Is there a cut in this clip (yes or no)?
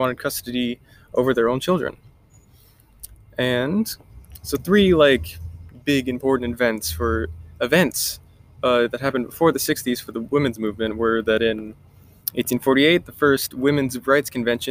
no